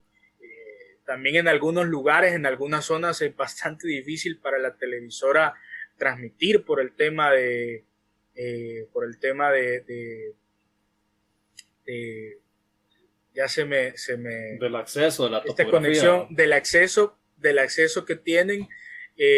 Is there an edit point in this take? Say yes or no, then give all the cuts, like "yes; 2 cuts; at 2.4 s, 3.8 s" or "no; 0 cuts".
no; 0 cuts